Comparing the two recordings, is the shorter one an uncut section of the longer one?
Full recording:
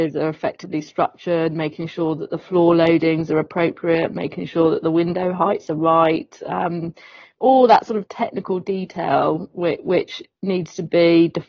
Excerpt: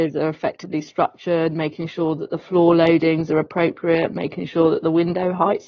yes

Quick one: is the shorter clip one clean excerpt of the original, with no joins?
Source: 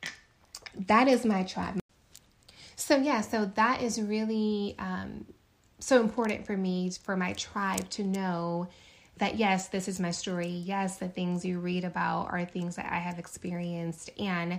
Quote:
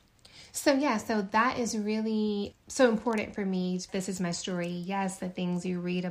no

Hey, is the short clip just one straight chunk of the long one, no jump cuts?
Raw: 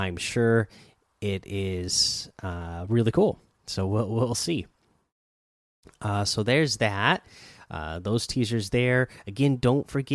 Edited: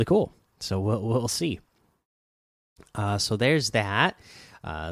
yes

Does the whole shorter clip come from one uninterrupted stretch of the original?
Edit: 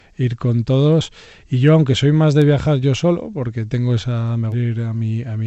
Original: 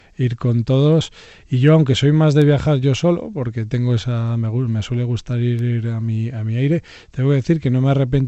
no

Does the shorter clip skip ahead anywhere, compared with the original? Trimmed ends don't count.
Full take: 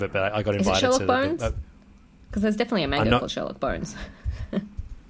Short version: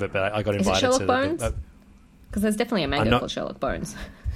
no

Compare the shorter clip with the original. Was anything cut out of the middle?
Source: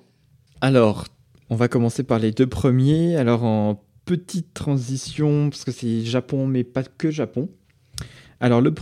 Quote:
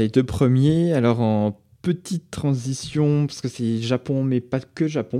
no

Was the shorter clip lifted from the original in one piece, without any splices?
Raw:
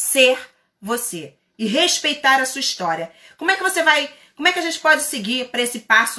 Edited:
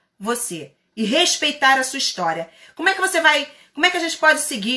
yes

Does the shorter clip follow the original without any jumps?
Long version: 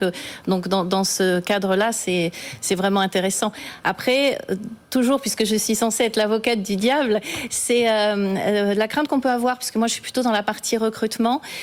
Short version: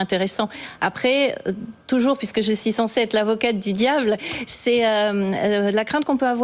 yes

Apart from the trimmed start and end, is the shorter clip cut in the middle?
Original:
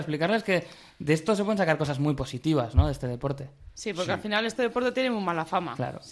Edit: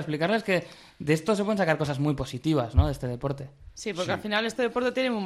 no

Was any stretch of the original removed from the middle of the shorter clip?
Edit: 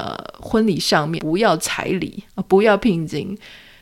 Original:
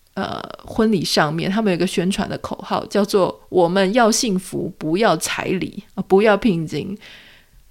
yes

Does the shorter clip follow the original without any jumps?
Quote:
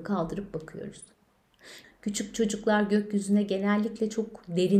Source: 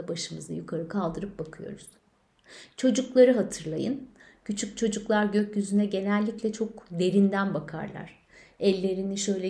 no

